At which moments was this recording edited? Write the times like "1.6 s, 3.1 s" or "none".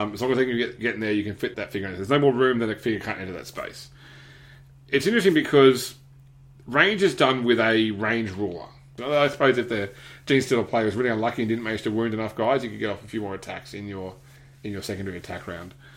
1.5 s, 9.0 s